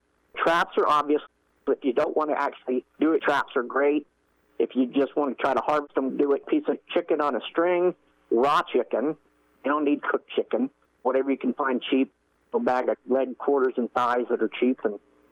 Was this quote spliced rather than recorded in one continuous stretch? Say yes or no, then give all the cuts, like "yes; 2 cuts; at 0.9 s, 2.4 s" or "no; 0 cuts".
yes; 3 cuts; at 3.2 s, 6.1 s, 10.9 s